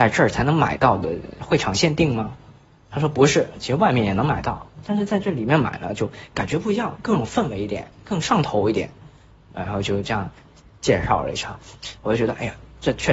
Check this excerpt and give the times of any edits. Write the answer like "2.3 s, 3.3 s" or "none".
none